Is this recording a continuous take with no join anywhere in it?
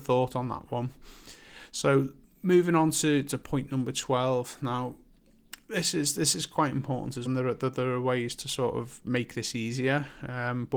no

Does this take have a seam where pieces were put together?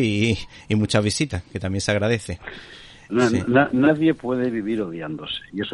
yes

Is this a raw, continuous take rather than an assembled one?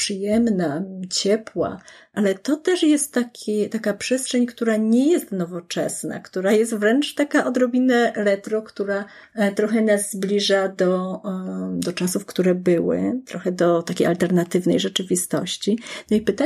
yes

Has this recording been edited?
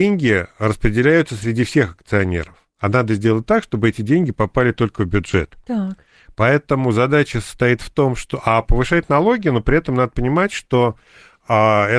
no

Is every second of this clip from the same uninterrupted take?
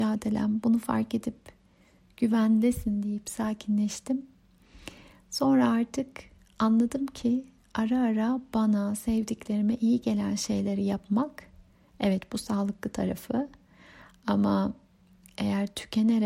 yes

